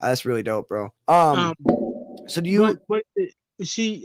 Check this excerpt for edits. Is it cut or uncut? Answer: cut